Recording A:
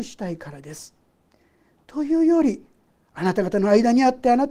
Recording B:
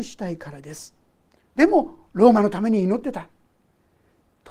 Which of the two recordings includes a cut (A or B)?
B